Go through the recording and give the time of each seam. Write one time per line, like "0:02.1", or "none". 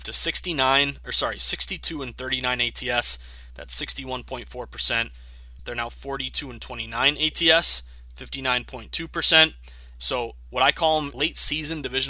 0:05.6
0:09.9
0:11.1